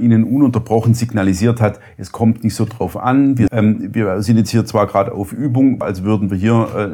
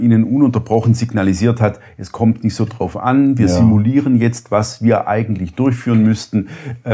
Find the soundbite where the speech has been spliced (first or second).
first